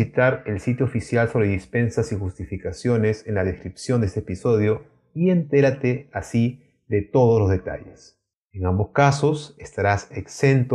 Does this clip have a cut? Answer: yes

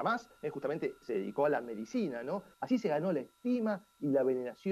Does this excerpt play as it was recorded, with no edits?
no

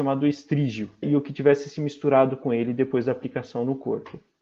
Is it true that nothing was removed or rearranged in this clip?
no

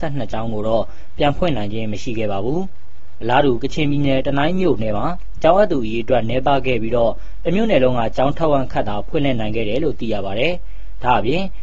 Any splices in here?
no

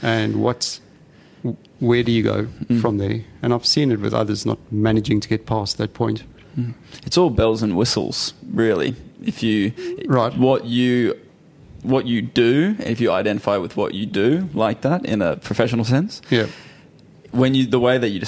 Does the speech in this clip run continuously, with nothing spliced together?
yes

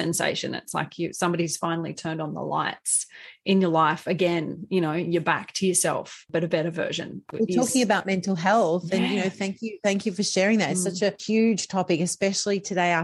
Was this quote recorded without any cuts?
yes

